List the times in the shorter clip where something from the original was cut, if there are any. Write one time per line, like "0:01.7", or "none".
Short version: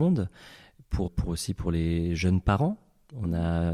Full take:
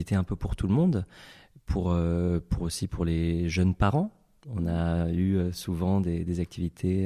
0:01.1